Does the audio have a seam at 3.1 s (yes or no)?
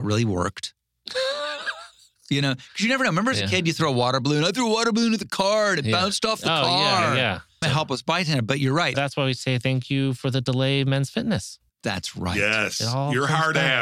no